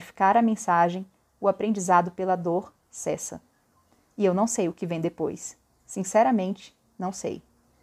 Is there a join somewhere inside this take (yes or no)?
no